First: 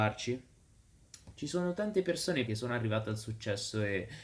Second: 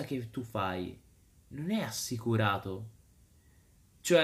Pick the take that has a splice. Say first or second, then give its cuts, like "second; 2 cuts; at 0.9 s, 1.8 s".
first; 2 cuts; at 1.4 s, 2.5 s